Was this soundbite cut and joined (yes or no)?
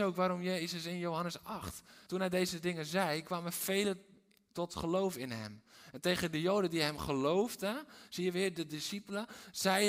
yes